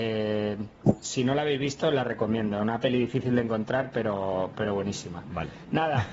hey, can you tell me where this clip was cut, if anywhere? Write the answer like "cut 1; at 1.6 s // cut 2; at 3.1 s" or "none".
none